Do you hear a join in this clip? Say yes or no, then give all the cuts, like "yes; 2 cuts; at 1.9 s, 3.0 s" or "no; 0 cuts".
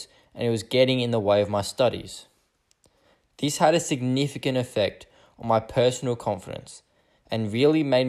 no; 0 cuts